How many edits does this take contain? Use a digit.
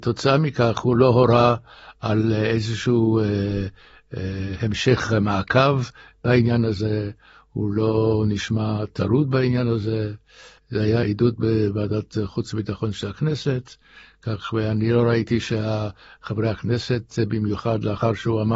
1